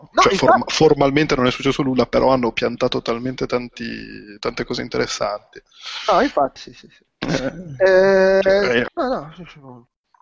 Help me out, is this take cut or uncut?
cut